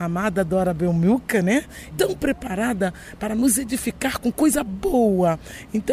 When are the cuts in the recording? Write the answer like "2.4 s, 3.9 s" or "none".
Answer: 1.9 s